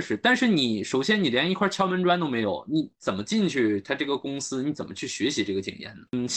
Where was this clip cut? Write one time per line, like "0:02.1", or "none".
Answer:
none